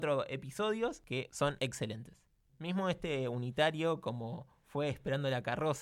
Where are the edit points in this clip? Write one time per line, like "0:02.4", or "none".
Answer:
none